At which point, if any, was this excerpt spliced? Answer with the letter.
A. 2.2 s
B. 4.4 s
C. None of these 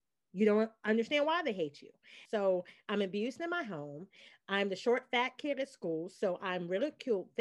A